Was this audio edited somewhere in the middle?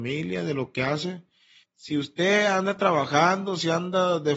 yes; 1 cut; at 1.6 s

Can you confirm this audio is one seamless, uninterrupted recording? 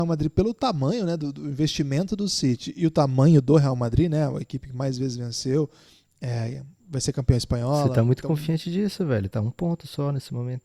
no; 1 cut; at 6.8 s

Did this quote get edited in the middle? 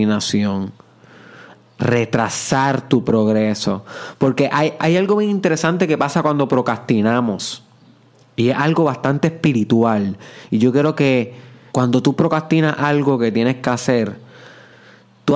yes; 2 cuts; at 4.8 s, 11.7 s

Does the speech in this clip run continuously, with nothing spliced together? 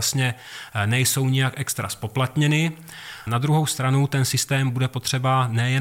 no; 1 cut; at 3.3 s

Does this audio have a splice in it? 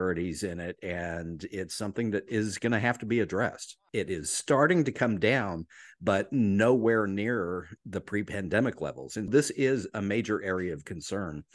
yes; 2 cuts; at 3.9 s, 9.3 s

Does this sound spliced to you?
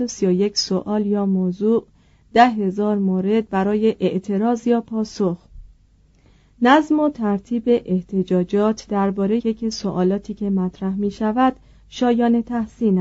yes; 1 cut; at 9.4 s

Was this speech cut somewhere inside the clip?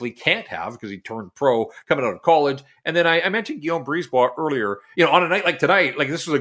no; 0 cuts

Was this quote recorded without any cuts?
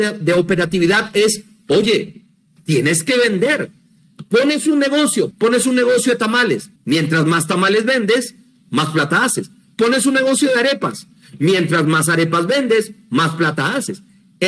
no; 2 cuts; at 5.3 s, 6.8 s

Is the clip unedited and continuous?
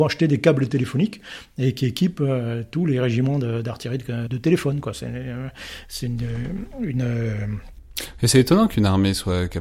no; 1 cut; at 4.3 s

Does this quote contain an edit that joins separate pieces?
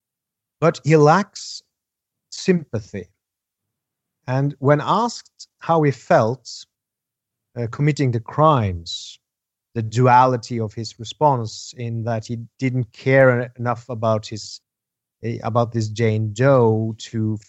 yes; 2 cuts; at 9.6 s, 12.5 s

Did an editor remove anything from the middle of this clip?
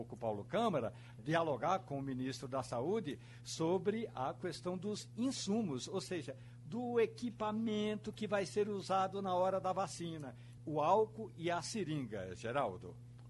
yes; 2 cuts; at 1.2 s, 10.6 s

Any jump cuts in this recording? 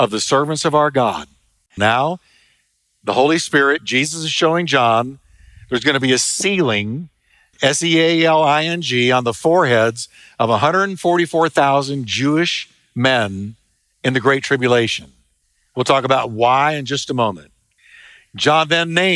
yes; 1 cut; at 1.8 s

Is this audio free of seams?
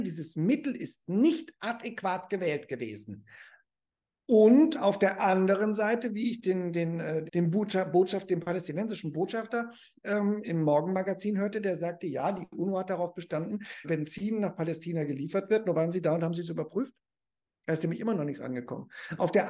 no; 3 cuts; at 7.3 s, 10.4 s, 13.8 s

